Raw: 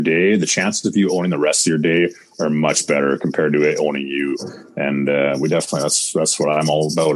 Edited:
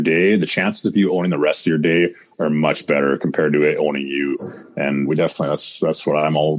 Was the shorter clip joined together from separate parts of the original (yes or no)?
yes